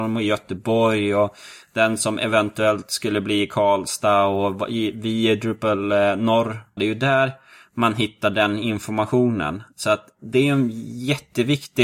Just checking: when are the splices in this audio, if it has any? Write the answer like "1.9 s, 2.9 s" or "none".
6.8 s